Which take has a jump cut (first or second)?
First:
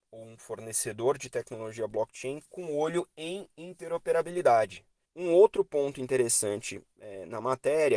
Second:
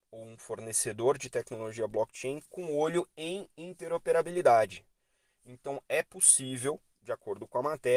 first